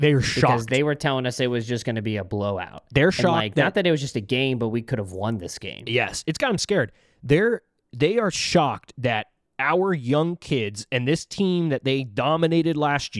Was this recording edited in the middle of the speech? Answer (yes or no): no